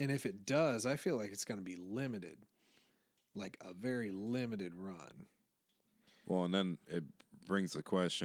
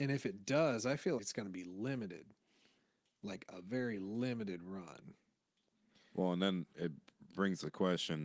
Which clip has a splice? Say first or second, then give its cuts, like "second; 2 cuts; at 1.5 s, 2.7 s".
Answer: second; 1 cut; at 1.2 s